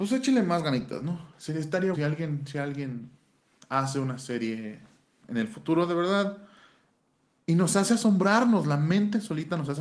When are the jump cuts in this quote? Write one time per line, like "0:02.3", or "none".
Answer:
0:01.9
0:07.4